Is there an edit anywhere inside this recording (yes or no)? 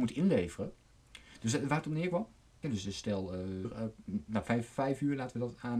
yes